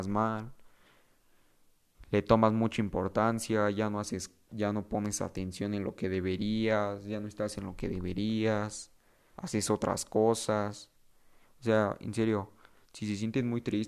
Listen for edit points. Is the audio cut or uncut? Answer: uncut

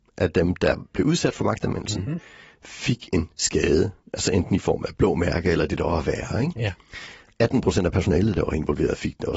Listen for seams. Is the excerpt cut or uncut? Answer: uncut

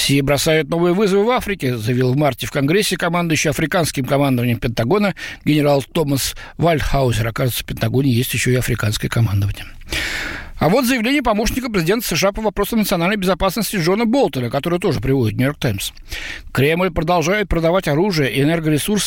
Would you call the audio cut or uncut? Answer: uncut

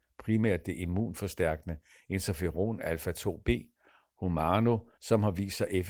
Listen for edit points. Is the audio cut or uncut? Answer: cut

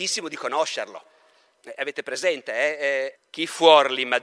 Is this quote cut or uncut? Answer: cut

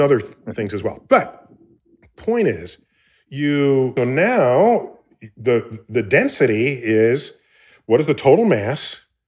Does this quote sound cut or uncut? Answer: cut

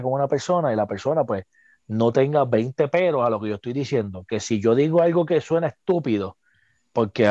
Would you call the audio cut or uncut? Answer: uncut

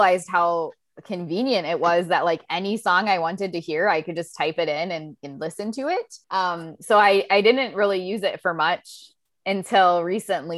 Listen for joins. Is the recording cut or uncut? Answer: cut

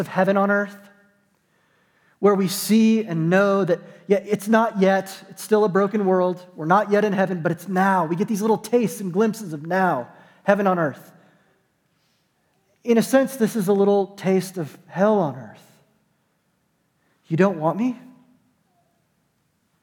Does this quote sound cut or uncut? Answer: uncut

